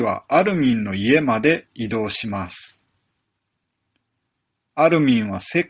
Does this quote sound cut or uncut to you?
uncut